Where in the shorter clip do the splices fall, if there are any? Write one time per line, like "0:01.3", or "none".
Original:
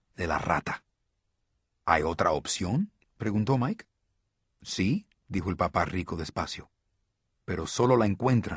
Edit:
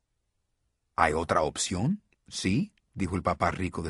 0:02.2